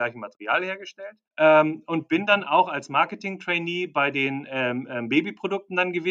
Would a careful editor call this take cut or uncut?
cut